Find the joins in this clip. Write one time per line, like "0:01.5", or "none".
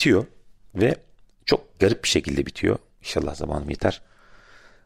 none